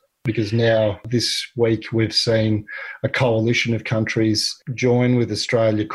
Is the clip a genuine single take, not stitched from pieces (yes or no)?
yes